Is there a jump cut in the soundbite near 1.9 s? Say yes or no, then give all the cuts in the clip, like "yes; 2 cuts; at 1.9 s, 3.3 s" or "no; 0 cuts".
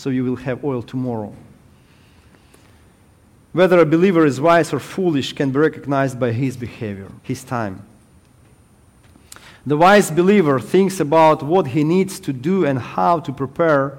no; 1 cut; at 7.2 s